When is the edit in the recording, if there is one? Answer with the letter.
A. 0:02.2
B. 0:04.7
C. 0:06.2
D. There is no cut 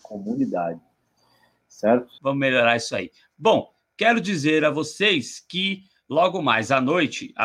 A